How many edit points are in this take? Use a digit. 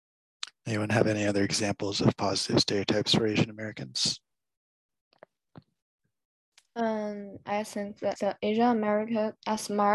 1